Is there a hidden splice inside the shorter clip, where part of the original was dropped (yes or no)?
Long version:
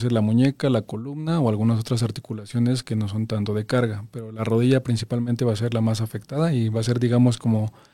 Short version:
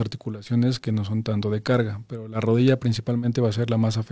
no